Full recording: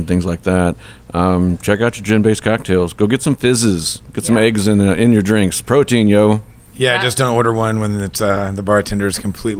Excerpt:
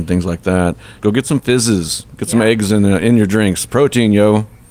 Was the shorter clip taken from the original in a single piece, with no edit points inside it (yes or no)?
no